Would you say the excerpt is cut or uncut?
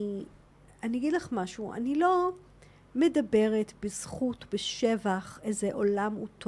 uncut